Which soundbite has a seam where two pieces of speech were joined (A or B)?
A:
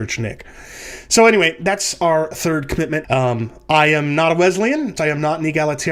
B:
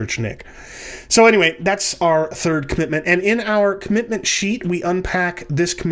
A